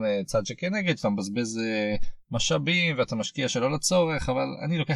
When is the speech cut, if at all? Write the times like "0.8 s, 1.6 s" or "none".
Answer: none